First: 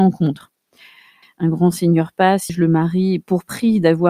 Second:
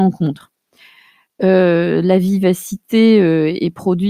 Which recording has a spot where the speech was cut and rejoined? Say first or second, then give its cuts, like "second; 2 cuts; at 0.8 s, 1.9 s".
first; 2 cuts; at 1.2 s, 2.5 s